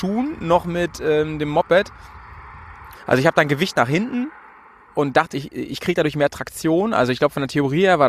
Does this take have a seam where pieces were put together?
yes; 2 cuts; at 2.9 s, 5.3 s

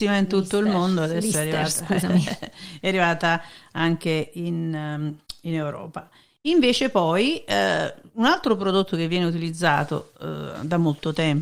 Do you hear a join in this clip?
no; 0 cuts

